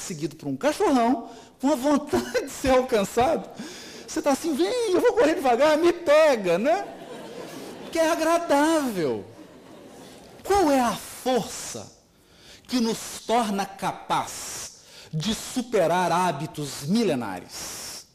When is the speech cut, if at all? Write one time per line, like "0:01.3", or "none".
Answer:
0:10.4